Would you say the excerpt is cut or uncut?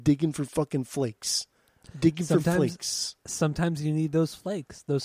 uncut